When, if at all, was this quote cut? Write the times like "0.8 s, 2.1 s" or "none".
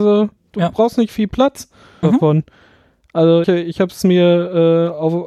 2.0 s, 3.4 s